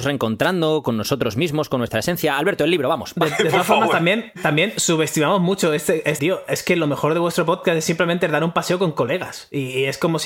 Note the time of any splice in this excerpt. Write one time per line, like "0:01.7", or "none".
0:06.2